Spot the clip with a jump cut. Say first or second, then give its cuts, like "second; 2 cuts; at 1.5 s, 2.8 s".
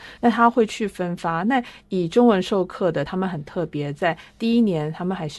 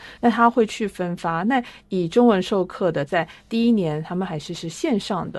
second; 1 cut; at 3.1 s